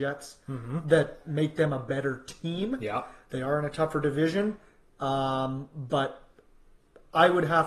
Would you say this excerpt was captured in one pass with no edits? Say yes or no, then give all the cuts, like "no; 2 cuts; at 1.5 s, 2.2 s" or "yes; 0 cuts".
yes; 0 cuts